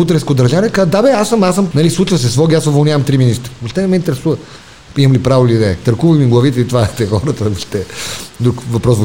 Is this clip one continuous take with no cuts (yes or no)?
no